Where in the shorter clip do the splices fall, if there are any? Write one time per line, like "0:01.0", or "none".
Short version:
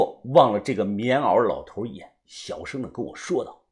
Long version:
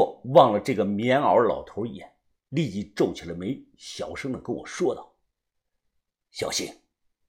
0:02.2